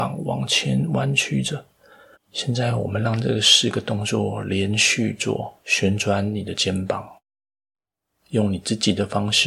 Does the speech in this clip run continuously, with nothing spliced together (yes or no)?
no